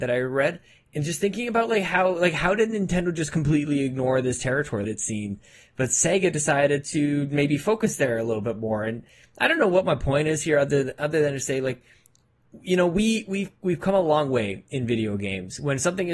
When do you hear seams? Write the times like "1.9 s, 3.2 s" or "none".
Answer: 4.8 s